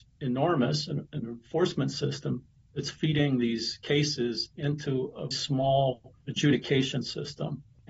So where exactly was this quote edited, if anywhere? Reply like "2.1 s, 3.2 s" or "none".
1.1 s, 5.3 s